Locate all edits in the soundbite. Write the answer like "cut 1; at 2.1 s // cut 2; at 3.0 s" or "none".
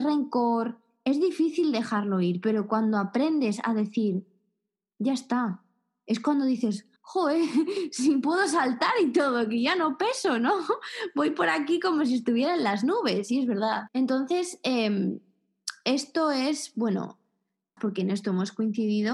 cut 1; at 7.0 s // cut 2; at 13.9 s // cut 3; at 17.8 s